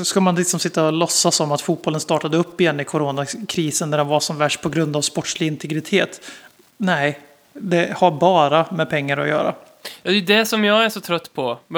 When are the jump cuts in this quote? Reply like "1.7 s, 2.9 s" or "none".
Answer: none